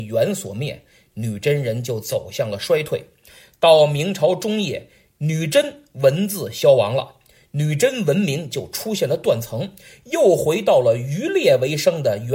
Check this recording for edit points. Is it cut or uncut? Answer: uncut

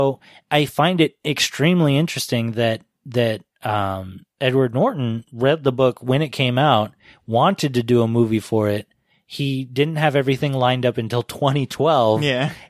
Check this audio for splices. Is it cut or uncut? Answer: uncut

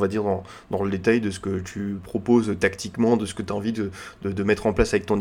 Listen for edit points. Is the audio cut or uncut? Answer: uncut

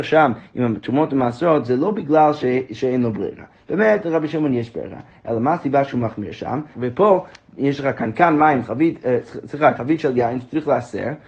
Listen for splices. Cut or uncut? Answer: cut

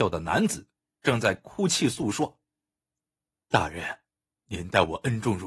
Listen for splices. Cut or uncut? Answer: cut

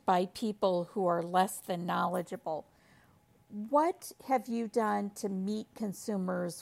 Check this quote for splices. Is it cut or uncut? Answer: uncut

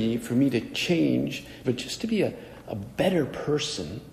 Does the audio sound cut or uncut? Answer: cut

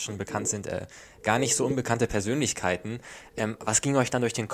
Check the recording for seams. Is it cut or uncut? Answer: uncut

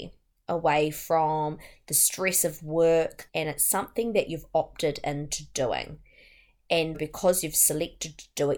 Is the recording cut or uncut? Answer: cut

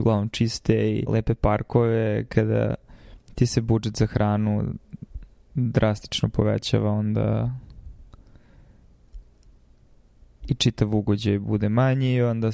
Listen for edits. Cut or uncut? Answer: cut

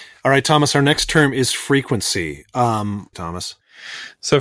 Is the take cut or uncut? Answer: cut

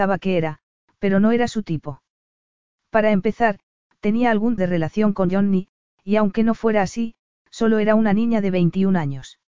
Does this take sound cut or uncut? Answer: cut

